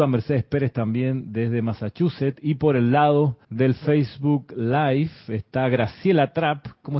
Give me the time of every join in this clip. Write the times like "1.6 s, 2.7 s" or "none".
3.4 s